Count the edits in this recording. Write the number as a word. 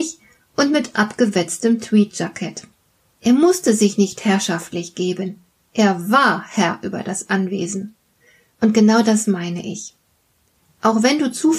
one